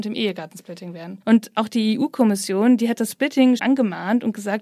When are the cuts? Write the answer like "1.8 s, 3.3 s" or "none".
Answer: 1.2 s, 3.6 s